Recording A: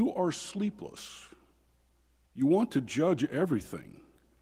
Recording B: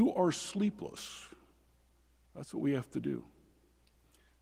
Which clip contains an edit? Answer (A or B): B